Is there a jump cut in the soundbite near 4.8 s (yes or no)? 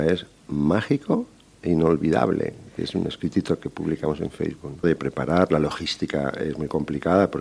yes